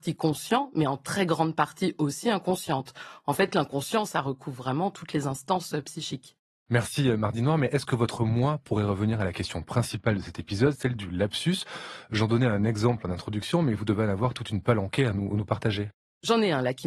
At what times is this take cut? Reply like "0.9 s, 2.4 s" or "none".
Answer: none